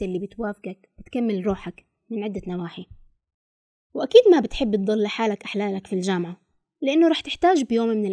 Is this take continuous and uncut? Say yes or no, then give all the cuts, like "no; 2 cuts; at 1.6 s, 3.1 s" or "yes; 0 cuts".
yes; 0 cuts